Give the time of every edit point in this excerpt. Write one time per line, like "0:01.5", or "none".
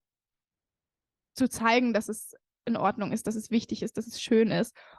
none